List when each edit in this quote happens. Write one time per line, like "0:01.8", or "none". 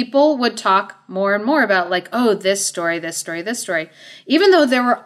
none